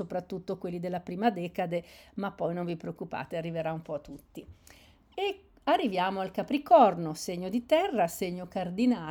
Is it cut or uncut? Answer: uncut